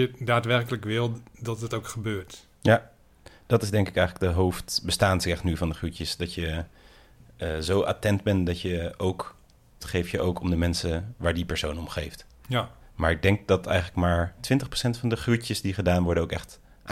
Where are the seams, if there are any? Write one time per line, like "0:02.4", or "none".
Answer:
0:09.8
0:12.8